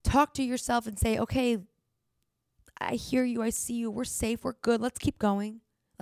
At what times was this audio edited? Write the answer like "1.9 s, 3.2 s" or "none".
none